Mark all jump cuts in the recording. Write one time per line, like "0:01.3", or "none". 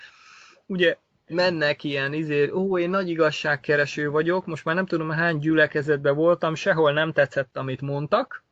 none